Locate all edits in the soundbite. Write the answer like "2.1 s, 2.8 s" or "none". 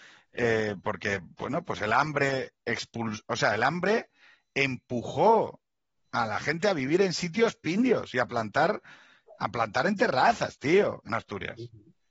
none